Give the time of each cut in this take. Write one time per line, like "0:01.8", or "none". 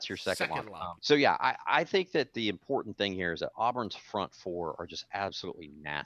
0:01.0